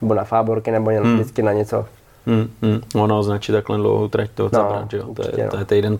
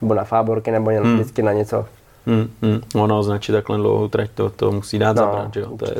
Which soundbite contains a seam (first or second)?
first